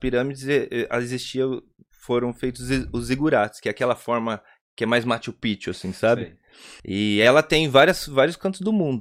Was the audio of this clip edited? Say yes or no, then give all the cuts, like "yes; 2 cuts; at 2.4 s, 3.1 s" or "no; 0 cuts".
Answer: yes; 1 cut; at 6.8 s